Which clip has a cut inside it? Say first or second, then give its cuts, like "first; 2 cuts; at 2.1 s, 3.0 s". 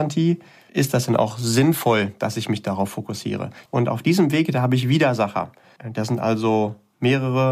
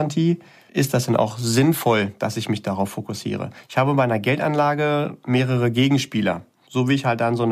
first; 1 cut; at 3.7 s